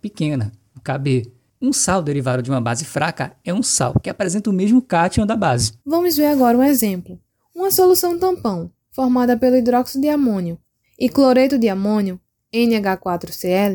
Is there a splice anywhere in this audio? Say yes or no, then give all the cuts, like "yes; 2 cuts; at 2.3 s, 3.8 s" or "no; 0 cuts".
yes; 2 cuts; at 5.8 s, 10.8 s